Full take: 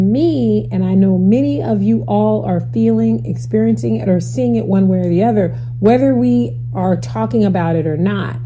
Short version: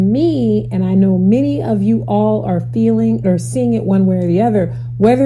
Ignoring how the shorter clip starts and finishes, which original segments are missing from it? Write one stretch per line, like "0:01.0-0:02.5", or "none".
0:03.2-0:04.0